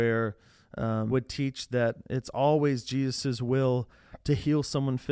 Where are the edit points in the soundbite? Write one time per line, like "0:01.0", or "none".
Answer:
0:01.1